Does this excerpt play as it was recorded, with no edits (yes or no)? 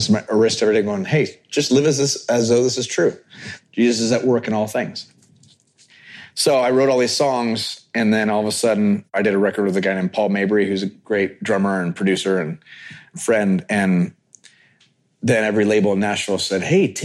yes